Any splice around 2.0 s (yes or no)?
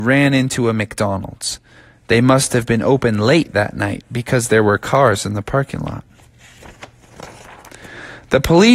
no